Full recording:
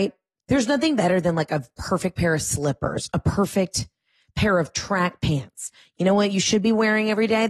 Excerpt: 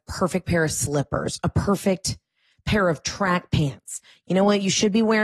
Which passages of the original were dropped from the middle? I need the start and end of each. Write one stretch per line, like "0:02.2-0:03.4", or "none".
none